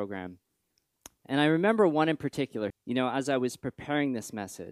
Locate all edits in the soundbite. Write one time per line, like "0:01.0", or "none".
0:01.2
0:02.7